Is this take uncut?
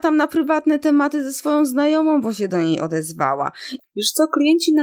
no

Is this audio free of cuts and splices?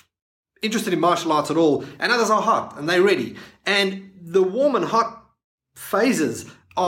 yes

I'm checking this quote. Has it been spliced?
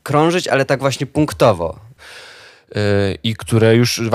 yes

